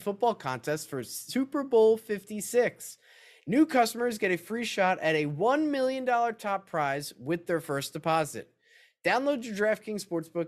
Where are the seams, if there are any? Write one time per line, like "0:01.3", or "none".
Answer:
none